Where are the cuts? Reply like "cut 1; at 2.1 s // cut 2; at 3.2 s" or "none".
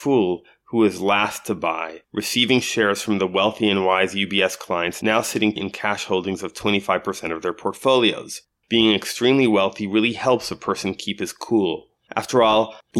cut 1; at 5.6 s // cut 2; at 8.6 s

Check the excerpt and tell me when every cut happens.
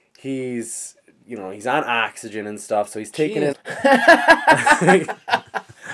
cut 1; at 3.5 s

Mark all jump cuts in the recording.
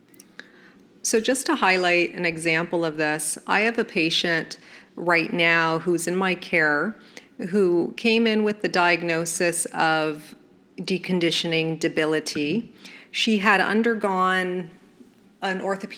none

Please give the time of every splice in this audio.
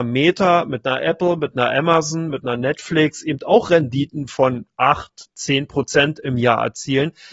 cut 1; at 2.3 s

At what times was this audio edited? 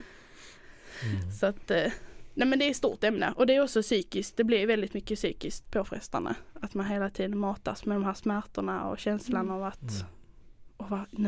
none

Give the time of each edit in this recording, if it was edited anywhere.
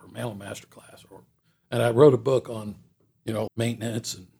cut 1; at 3.5 s

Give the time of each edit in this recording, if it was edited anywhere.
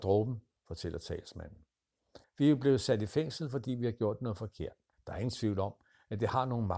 cut 1; at 2.2 s // cut 2; at 4.9 s

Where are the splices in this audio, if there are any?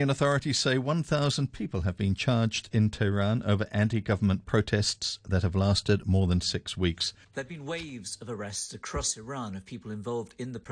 cut 1; at 7.2 s

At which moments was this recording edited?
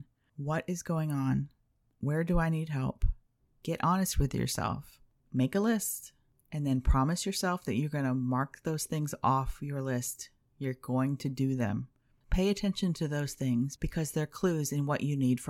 cut 1; at 3.4 s // cut 2; at 12.2 s

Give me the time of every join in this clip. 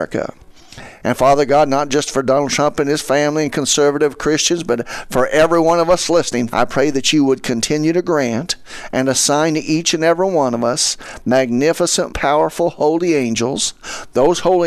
cut 1; at 1.0 s // cut 2; at 6.5 s // cut 3; at 12.1 s

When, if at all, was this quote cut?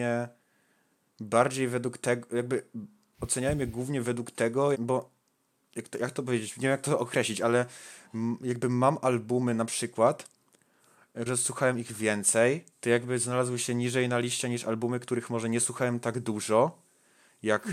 cut 1; at 4.7 s // cut 2; at 11.3 s // cut 3; at 12.7 s

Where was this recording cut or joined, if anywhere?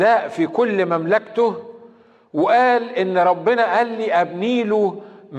none

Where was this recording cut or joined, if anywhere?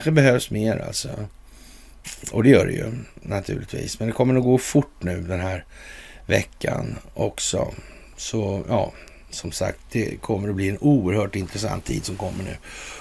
none

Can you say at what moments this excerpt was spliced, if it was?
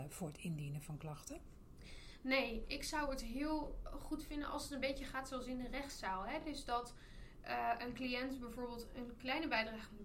none

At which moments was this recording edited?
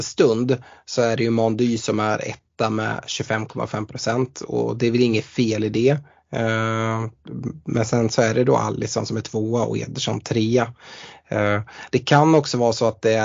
none

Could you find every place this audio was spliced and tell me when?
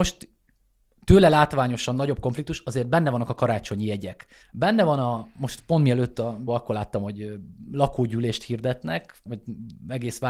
cut 1; at 4.4 s // cut 2; at 6.5 s // cut 3; at 9.3 s

